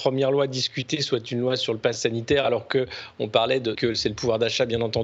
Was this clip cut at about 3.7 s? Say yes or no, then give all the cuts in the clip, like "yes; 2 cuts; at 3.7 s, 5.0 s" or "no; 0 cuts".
yes; 1 cut; at 3.7 s